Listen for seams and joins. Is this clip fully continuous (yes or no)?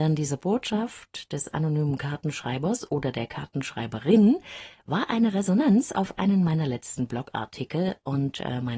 yes